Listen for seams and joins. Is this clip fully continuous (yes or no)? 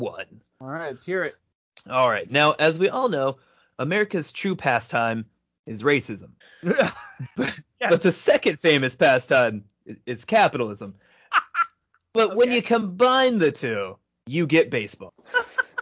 yes